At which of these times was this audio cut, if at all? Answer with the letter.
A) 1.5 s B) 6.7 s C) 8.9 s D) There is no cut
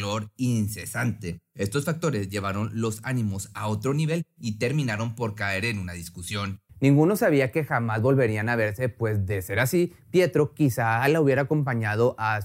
D